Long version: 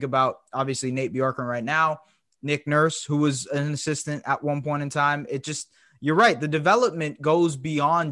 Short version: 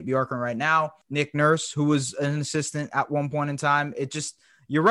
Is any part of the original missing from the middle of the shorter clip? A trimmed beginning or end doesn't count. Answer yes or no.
yes